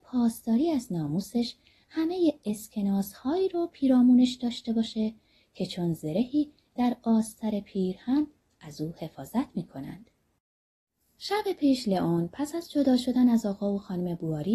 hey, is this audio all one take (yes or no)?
yes